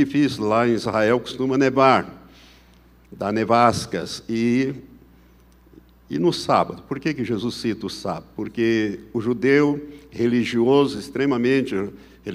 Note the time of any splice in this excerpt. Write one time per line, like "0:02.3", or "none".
none